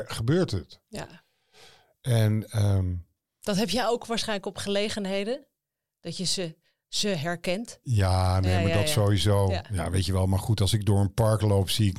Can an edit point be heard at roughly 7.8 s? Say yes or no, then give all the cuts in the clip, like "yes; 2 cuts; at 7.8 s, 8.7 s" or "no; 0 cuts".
no; 0 cuts